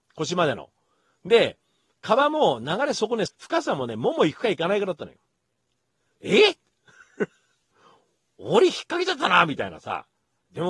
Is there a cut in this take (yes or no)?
yes